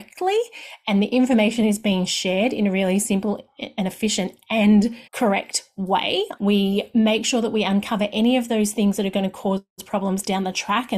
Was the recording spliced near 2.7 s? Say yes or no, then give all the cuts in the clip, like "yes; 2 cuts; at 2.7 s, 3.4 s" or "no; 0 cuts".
no; 2 cuts; at 5.1 s, 6.4 s